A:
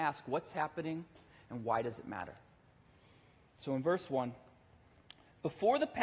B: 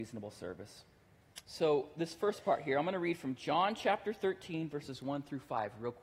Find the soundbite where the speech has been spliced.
B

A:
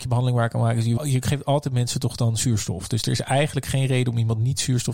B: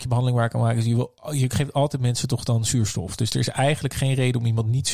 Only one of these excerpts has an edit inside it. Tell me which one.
A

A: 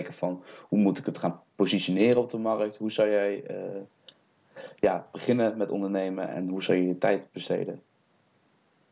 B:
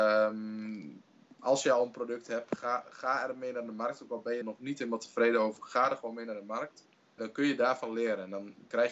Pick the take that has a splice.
B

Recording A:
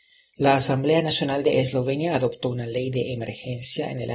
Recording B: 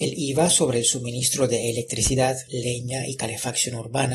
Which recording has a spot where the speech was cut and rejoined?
B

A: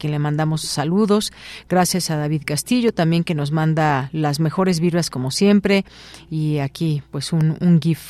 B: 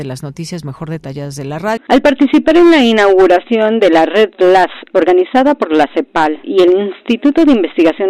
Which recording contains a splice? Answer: B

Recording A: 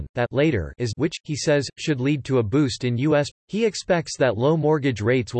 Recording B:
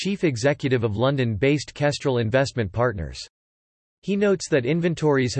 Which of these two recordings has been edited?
A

